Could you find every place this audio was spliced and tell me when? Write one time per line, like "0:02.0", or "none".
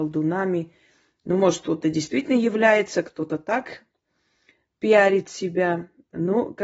none

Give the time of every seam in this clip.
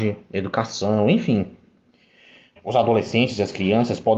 0:02.6

